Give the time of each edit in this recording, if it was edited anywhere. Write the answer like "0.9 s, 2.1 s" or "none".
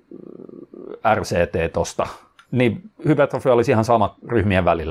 2.4 s